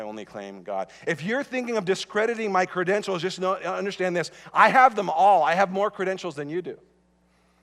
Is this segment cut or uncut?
uncut